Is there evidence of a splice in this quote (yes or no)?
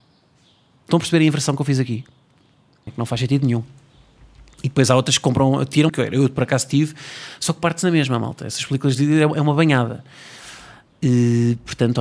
yes